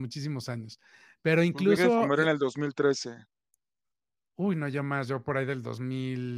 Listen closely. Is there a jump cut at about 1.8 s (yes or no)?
no